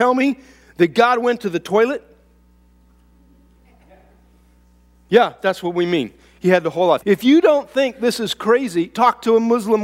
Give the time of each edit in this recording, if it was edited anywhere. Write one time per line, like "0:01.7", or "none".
0:07.0